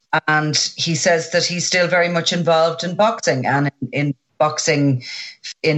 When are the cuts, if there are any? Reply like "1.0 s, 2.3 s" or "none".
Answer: none